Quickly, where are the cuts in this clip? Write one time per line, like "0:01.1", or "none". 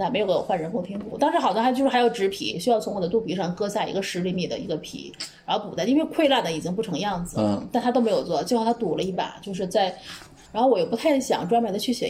0:10.5

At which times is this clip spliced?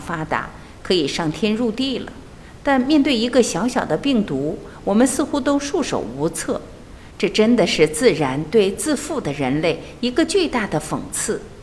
none

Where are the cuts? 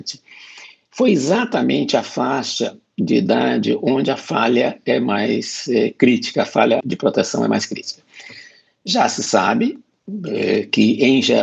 0:06.8

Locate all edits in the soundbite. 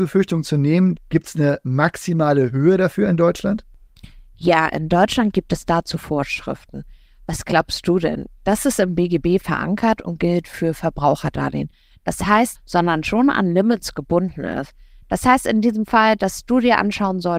0:01.0
0:12.5

